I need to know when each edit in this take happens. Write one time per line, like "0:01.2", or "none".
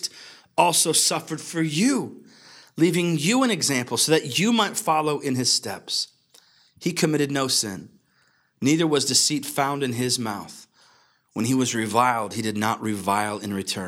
none